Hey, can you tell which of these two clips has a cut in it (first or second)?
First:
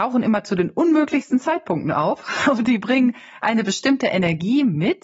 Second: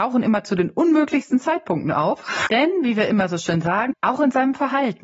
second